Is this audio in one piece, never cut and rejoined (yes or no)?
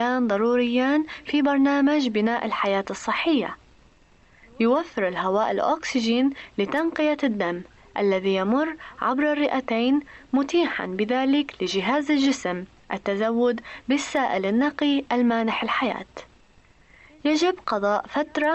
yes